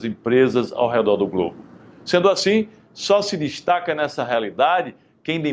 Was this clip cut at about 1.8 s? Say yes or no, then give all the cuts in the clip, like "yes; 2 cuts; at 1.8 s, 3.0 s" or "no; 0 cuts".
no; 0 cuts